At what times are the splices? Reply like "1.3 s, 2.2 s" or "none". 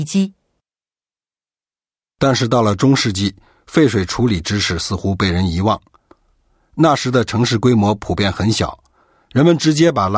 none